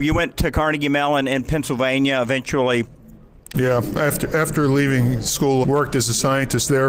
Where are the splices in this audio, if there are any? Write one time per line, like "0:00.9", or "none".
0:03.5
0:05.6

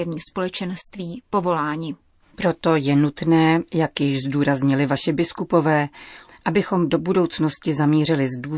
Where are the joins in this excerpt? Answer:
0:02.2
0:06.3

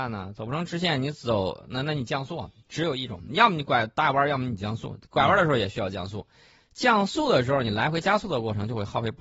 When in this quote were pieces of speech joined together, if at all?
none

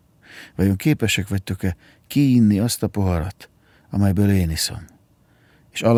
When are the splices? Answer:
none

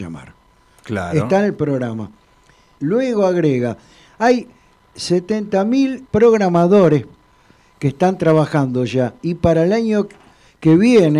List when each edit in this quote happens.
0:02.8
0:06.1

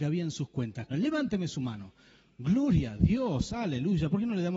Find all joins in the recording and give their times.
0:00.9

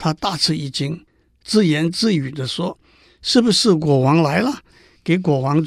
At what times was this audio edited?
0:04.7

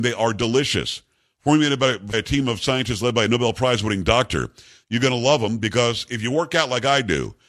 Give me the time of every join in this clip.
0:02.1
0:04.8

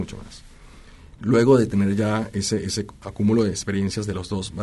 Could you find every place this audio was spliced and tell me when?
0:01.2

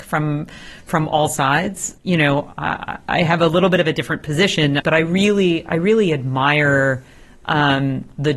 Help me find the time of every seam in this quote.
0:02.0
0:04.8

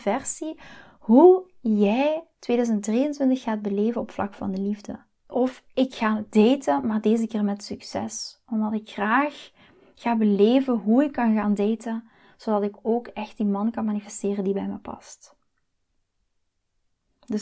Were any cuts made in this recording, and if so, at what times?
0:05.2

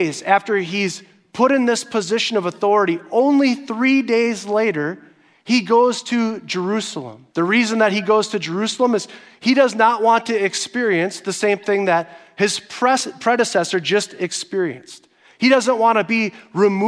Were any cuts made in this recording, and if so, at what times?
0:07.3

